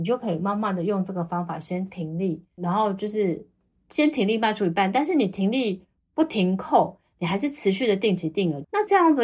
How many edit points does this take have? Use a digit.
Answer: 0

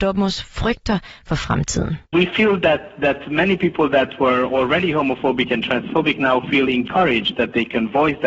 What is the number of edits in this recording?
1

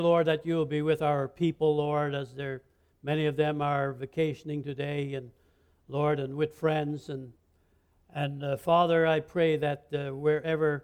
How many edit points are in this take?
0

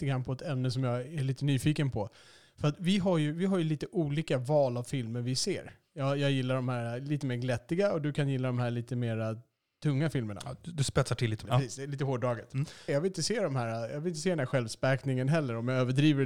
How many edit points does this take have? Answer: 2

